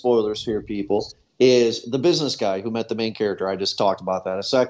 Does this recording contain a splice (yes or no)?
no